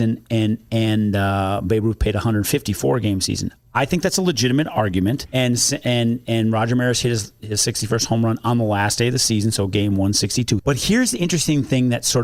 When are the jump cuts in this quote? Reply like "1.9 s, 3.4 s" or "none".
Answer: 5.3 s, 10.6 s

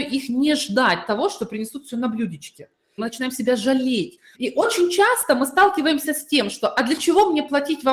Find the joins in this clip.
3.0 s, 4.3 s

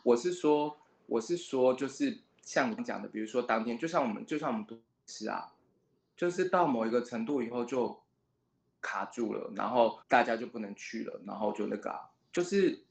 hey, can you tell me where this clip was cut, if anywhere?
2.8 s, 10.0 s

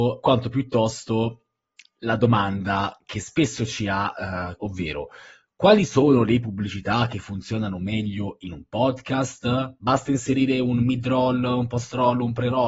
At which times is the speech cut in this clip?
4.6 s

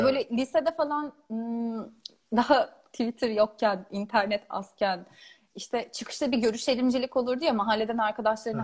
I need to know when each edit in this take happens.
none

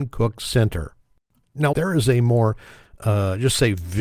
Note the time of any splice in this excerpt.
1.7 s

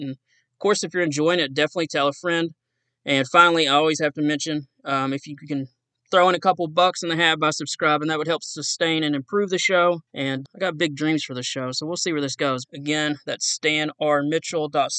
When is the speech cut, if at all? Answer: 10.1 s, 12.6 s

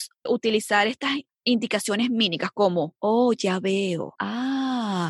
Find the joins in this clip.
4.1 s

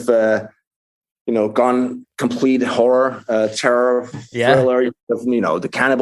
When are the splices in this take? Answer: none

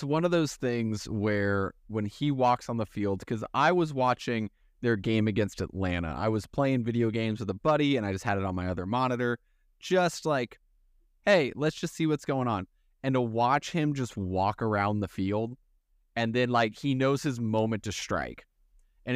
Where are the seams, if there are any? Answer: none

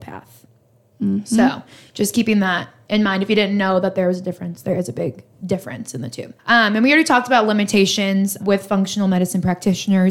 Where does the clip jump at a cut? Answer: 6.4 s, 8.4 s

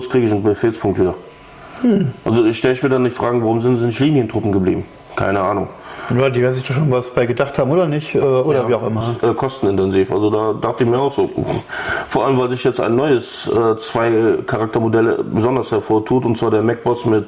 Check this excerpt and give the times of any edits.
9.0 s

